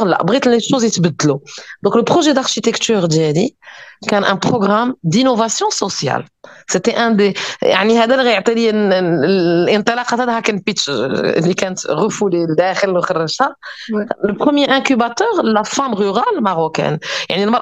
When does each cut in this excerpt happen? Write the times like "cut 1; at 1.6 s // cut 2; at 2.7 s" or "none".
none